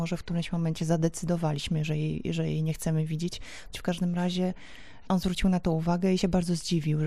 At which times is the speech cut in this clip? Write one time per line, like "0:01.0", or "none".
0:03.7